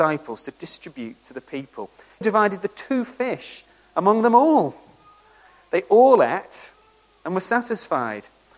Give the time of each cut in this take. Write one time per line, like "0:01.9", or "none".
0:02.2